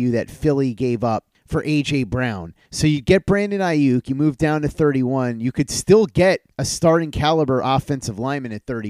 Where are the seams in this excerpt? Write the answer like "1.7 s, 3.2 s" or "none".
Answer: none